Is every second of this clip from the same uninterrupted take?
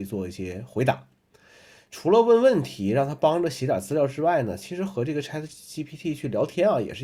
yes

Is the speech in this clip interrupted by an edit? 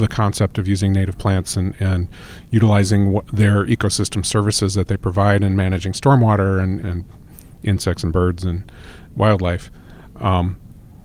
yes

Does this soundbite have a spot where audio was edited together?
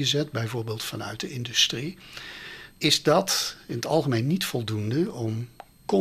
yes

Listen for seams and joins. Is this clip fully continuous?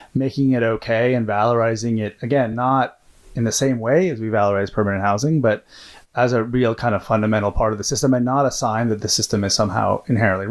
yes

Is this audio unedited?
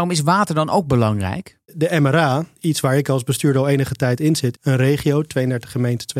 no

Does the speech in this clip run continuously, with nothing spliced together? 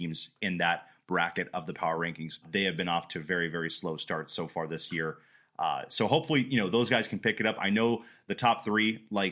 no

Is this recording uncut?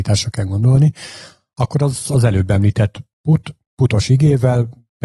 yes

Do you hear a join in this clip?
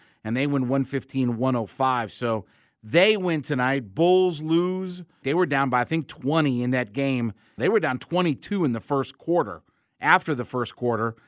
yes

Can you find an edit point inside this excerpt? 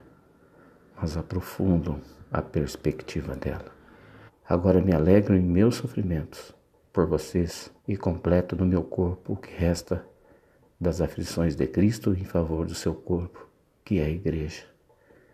yes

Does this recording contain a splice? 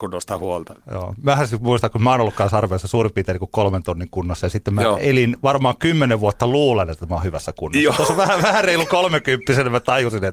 no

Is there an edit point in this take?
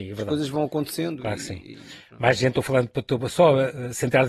no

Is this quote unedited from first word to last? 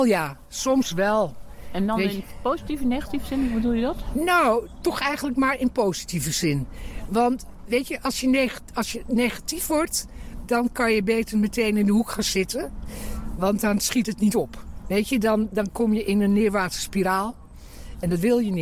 yes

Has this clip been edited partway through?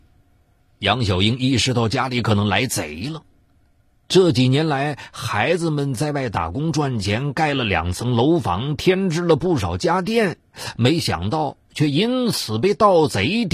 no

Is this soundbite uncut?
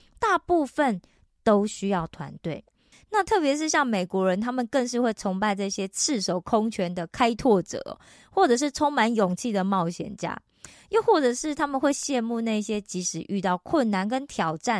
no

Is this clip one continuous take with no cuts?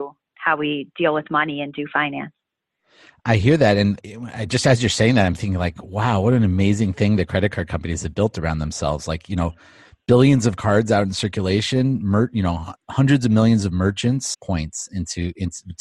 no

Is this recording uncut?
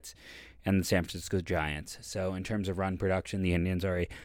yes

